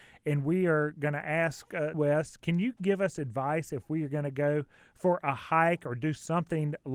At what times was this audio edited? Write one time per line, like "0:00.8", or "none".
0:01.9